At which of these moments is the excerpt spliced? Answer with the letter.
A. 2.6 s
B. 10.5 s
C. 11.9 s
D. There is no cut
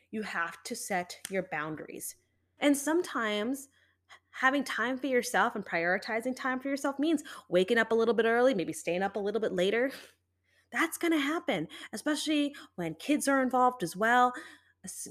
A